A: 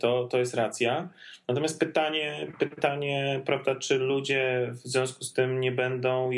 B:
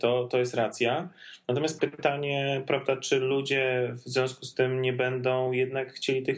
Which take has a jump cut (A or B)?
B